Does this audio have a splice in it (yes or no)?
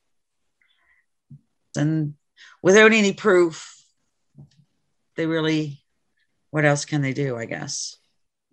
yes